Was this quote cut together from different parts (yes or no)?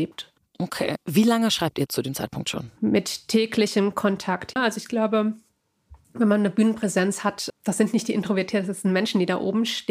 yes